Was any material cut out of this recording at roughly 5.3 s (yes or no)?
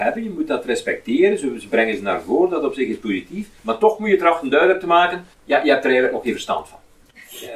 yes